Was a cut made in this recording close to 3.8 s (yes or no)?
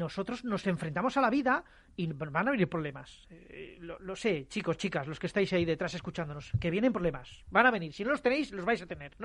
no